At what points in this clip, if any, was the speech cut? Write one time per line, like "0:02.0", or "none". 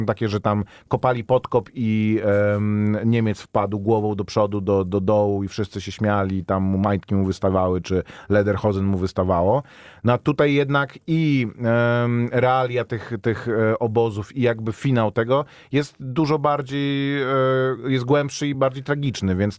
0:18.5